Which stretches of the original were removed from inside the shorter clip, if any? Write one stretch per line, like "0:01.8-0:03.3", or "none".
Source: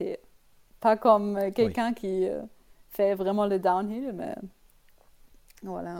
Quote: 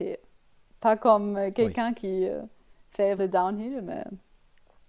0:03.2-0:03.5